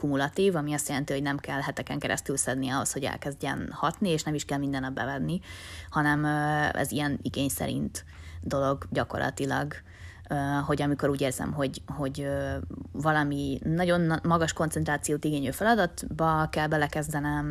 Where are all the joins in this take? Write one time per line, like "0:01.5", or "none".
none